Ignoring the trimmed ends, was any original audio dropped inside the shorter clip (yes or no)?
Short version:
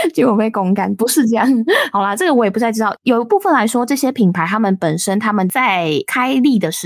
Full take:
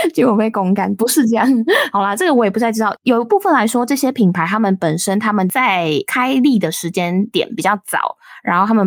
no